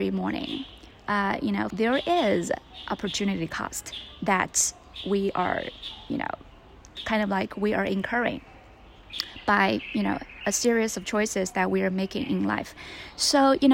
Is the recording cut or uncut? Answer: cut